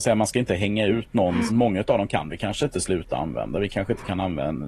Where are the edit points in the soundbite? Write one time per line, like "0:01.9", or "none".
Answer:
0:01.5